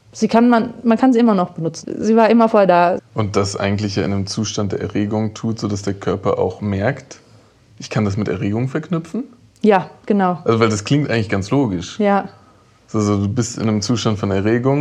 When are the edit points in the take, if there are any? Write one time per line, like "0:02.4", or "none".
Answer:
0:01.8
0:03.0